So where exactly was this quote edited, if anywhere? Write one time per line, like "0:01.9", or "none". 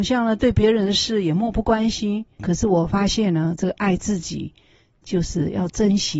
0:02.4